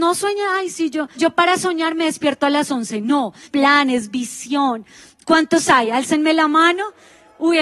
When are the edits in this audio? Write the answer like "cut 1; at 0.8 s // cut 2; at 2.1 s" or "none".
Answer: cut 1; at 1.1 s // cut 2; at 3.4 s